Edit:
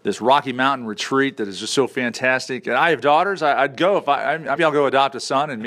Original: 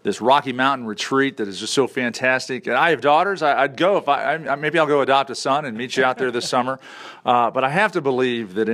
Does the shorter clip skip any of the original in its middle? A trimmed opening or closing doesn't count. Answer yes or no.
yes